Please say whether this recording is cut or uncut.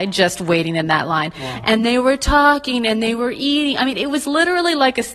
uncut